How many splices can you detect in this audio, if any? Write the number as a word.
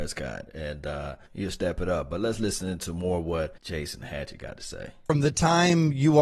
two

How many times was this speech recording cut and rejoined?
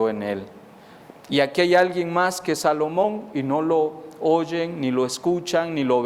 one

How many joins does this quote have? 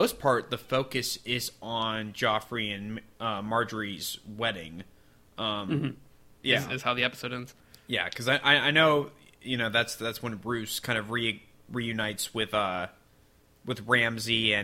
one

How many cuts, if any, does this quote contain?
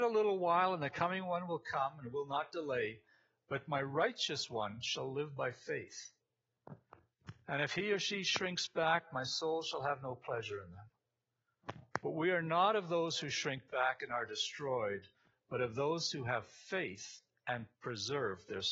one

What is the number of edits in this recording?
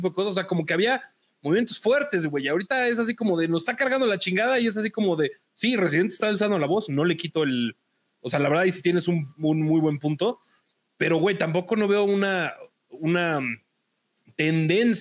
zero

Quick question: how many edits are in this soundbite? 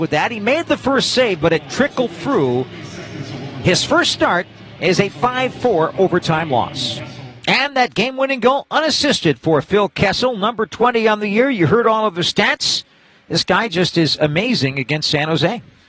zero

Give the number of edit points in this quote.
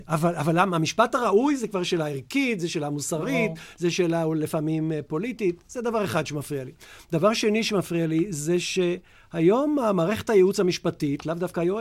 zero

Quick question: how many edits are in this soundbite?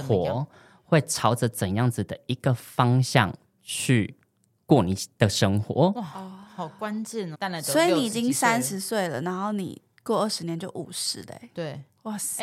one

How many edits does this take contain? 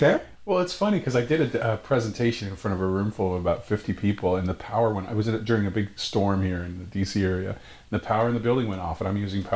zero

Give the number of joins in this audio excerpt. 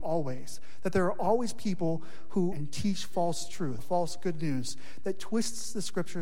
two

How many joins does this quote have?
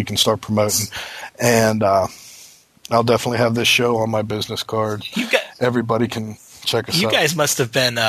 one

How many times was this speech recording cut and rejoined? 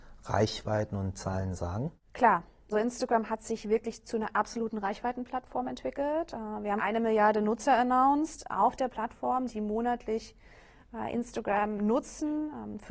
one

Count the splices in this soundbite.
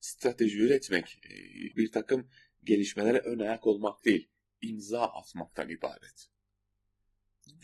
one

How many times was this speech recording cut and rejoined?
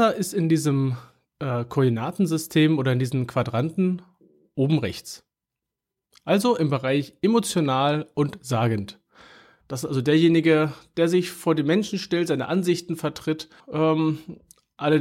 two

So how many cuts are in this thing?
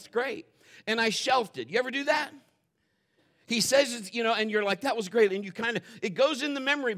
one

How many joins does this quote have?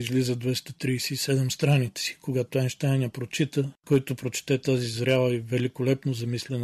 one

